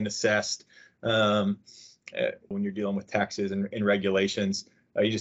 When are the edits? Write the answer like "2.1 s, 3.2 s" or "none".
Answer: 2.5 s